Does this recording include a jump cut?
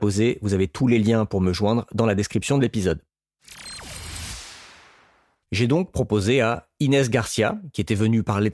yes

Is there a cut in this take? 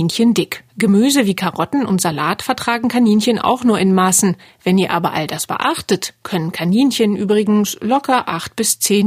no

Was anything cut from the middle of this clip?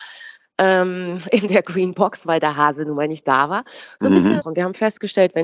yes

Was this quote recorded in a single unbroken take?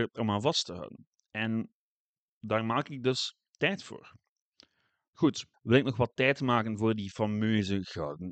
no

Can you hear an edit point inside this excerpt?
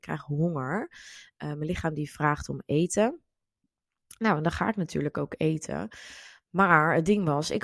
no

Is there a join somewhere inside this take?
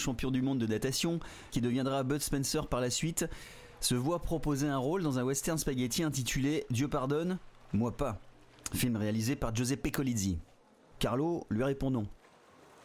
yes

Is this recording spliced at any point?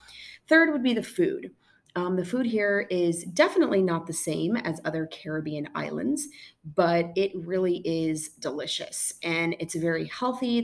no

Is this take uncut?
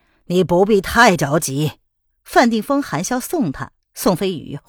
no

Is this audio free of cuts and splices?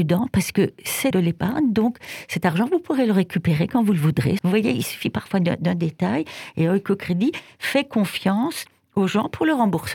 no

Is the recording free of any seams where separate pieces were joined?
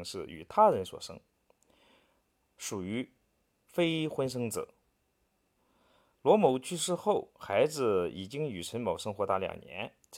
yes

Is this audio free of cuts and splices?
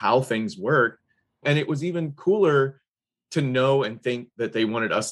no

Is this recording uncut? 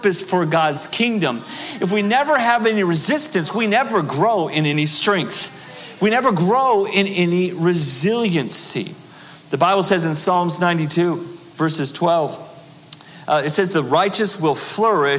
yes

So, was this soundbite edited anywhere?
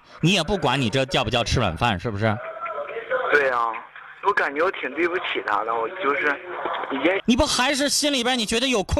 yes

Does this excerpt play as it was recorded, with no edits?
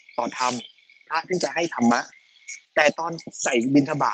no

